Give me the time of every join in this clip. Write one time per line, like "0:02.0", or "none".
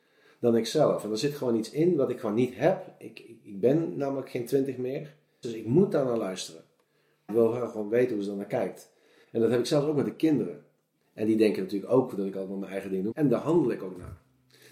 0:05.4
0:07.3
0:13.1